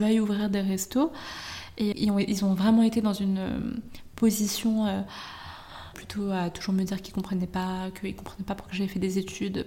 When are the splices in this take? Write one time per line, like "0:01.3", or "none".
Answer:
0:01.9
0:05.9